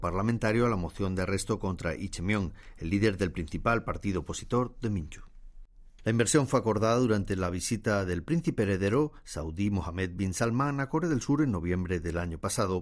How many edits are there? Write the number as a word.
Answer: one